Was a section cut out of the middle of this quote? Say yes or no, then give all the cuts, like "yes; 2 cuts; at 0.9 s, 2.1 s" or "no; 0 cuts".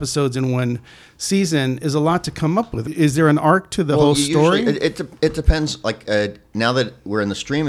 no; 0 cuts